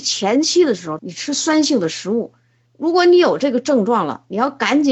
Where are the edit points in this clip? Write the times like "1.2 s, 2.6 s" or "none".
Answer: 1.0 s